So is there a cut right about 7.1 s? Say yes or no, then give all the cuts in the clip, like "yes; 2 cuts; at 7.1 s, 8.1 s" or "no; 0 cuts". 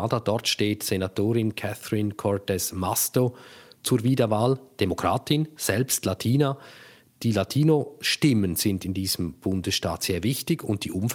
no; 0 cuts